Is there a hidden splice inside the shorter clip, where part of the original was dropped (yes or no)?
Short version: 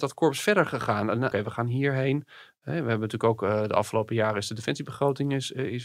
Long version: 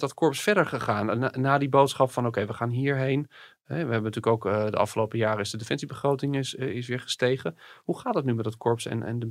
yes